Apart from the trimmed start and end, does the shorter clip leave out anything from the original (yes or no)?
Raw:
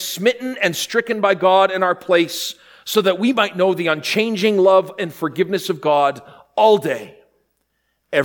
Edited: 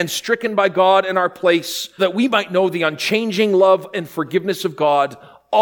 yes